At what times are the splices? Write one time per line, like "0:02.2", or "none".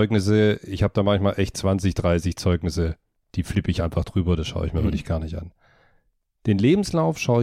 none